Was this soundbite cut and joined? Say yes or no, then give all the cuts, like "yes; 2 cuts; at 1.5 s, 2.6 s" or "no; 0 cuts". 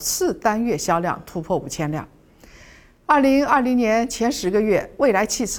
no; 0 cuts